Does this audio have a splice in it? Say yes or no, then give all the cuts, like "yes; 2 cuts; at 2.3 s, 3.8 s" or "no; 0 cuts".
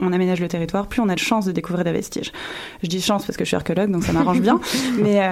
no; 0 cuts